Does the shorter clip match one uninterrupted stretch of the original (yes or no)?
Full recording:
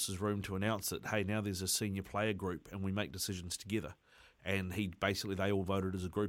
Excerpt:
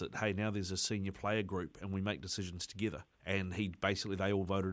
no